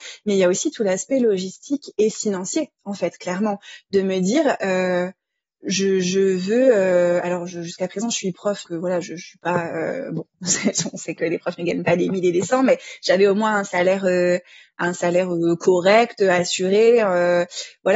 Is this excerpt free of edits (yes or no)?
no